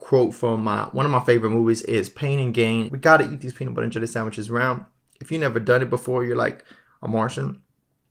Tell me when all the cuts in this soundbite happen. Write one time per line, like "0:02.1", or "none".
0:02.9